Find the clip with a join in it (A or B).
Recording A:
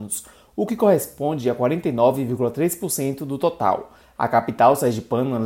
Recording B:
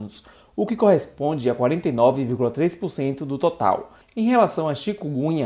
B